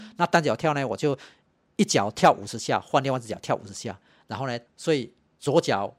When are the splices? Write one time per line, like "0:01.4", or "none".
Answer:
0:04.7